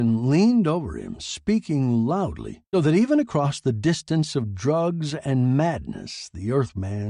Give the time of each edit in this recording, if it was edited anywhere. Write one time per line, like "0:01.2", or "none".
0:02.7